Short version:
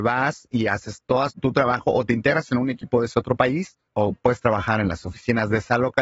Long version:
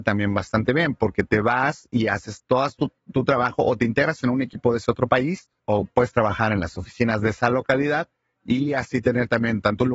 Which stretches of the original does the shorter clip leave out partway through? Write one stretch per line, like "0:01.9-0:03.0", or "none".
0:02.7-0:03.0